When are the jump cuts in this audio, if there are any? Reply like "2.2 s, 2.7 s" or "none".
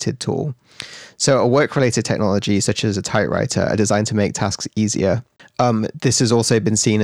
none